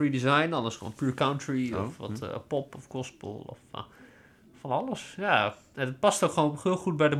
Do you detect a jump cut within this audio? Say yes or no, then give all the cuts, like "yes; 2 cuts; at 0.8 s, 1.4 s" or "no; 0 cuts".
no; 0 cuts